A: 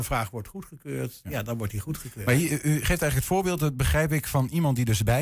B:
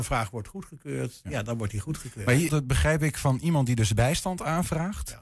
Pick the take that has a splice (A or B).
B